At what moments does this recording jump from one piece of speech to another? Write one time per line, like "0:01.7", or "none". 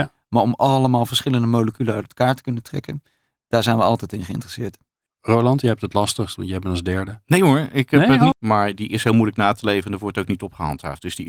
0:05.1
0:08.3